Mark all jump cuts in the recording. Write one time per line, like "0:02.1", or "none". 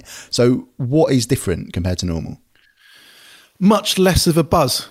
none